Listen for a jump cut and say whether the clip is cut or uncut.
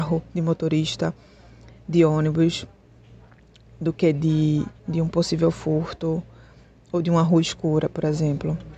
cut